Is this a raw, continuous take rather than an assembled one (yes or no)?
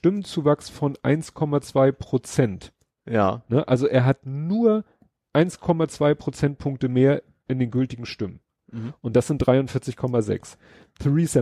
no